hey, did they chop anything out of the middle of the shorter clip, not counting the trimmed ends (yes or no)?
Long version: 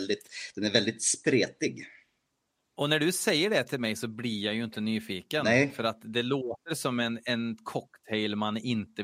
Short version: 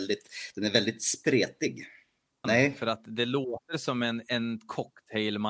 yes